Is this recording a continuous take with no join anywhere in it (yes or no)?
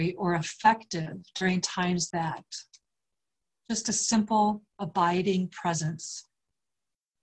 no